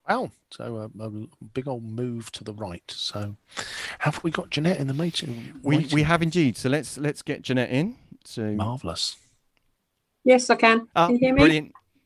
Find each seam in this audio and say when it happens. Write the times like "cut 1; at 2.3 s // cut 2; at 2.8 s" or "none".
none